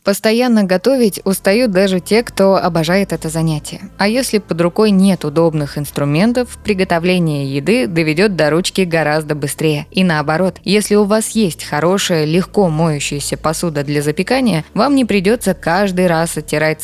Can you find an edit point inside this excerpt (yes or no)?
no